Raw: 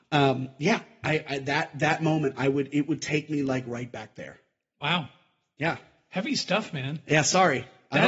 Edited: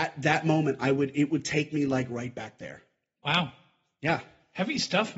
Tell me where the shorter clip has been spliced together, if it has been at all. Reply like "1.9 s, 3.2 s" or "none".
none